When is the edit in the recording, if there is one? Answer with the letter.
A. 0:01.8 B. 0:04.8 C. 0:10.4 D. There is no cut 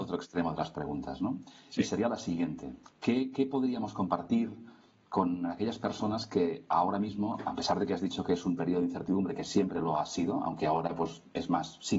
D